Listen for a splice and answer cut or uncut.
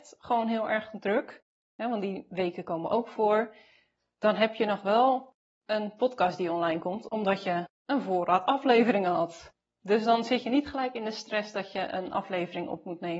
uncut